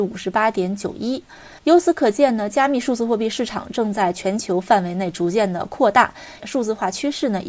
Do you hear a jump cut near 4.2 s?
no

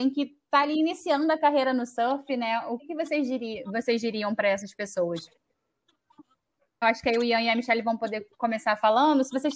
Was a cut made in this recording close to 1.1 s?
no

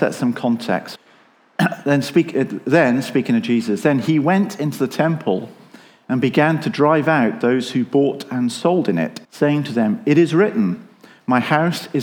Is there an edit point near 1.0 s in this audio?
yes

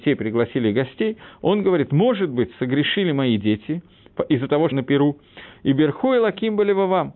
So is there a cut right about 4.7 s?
yes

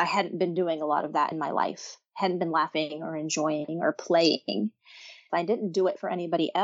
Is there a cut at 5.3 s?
yes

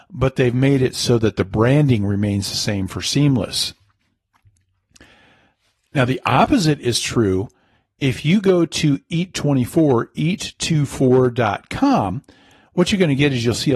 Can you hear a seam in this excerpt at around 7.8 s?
no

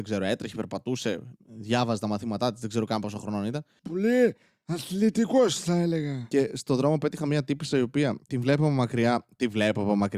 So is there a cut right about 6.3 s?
no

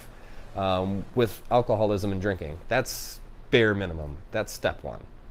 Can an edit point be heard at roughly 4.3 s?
no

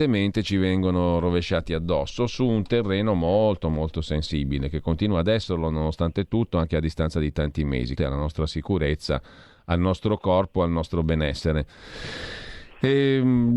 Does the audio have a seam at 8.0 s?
yes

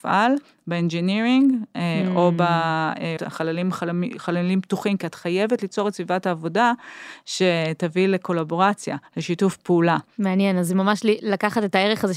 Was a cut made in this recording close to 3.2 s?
yes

